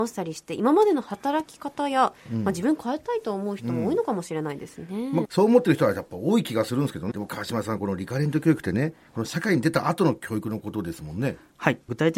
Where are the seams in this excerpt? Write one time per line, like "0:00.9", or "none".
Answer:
0:05.2
0:07.1